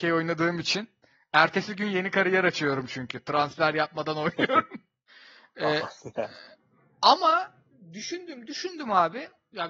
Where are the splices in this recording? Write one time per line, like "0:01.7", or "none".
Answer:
0:05.1